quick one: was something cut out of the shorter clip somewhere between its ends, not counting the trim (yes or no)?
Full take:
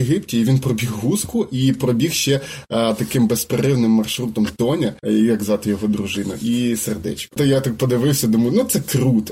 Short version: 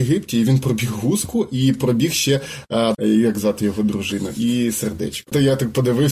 yes